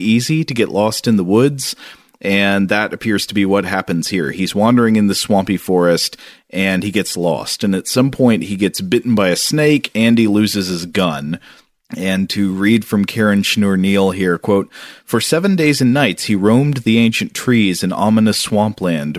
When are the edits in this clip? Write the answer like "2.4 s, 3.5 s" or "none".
none